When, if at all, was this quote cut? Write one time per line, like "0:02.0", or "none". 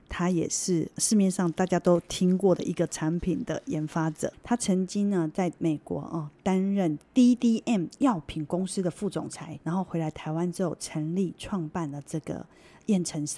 0:04.3
0:09.6